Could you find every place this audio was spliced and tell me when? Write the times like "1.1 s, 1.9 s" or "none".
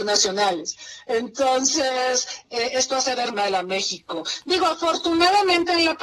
3.3 s